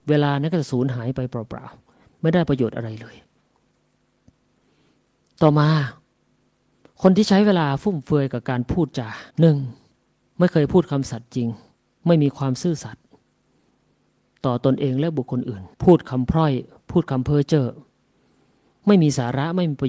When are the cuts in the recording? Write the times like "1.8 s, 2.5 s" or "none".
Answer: 9.3 s, 15.7 s